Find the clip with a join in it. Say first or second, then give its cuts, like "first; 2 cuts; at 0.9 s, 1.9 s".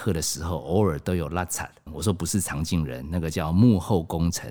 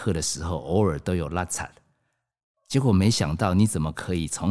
first; 1 cut; at 1.9 s